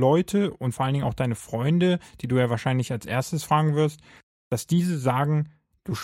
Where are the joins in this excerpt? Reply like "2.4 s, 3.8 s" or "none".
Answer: none